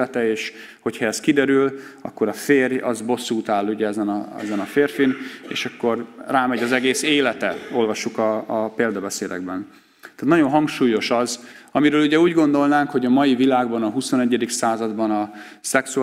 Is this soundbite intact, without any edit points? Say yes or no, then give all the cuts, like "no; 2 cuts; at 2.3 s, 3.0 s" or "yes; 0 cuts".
yes; 0 cuts